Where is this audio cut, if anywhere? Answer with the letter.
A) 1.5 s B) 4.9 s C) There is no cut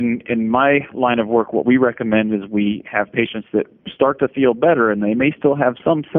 C